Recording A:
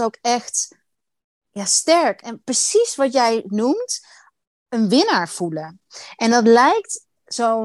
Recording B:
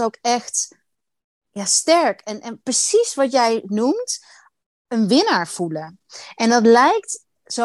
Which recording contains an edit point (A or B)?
A